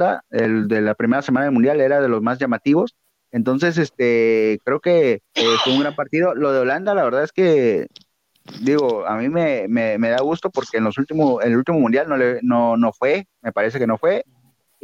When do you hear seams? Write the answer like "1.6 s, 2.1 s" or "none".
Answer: 5.2 s